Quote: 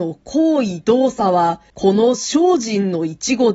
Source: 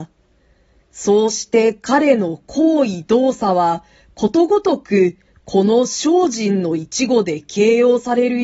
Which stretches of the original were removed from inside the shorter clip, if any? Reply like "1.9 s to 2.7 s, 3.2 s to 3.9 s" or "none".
3.9 s to 5.4 s